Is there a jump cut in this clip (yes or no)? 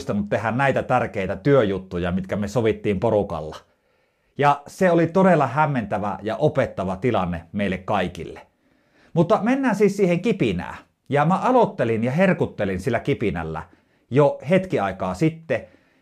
no